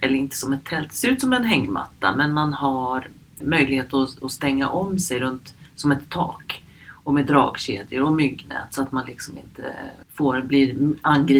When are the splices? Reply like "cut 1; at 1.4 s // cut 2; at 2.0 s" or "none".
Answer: cut 1; at 3.4 s